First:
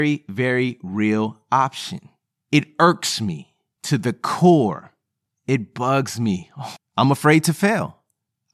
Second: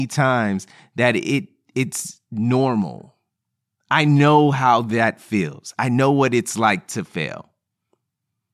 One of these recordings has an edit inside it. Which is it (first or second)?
first